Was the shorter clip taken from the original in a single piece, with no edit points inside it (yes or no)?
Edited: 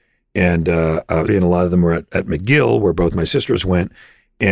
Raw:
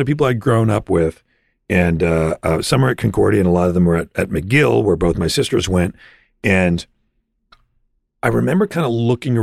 no